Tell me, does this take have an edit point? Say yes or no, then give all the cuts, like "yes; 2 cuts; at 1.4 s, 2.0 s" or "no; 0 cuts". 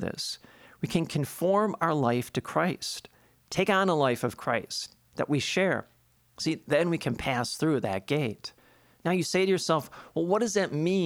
no; 0 cuts